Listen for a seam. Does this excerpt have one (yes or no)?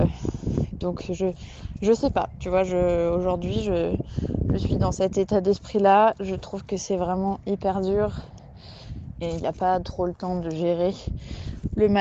yes